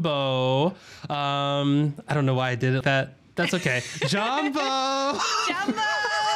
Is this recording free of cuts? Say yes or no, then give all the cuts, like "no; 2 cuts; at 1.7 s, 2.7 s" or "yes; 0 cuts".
no; 1 cut; at 2.8 s